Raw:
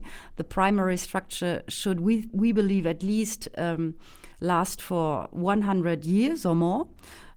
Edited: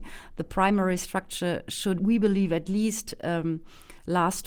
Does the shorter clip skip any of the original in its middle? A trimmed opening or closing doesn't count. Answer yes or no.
yes